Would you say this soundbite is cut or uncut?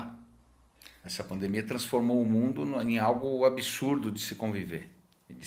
cut